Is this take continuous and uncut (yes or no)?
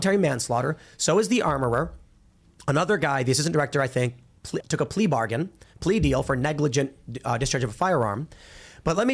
no